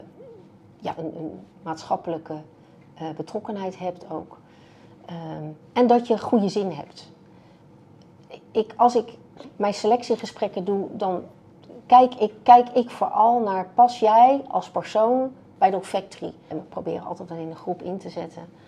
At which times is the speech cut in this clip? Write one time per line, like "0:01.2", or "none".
0:01.0
0:16.5